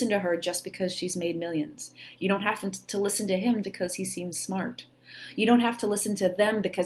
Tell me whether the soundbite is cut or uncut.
cut